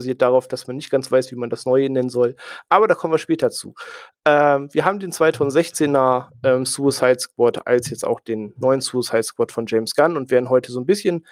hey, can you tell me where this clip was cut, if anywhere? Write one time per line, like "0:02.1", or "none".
none